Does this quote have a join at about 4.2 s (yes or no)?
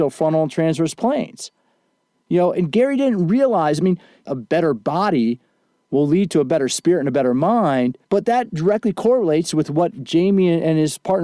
yes